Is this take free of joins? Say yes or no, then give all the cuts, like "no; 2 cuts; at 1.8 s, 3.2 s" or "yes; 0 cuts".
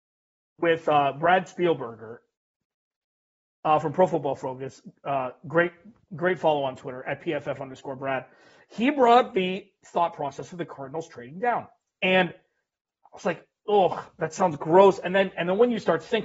yes; 0 cuts